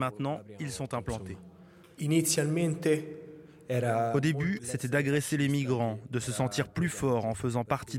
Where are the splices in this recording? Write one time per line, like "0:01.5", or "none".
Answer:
0:04.6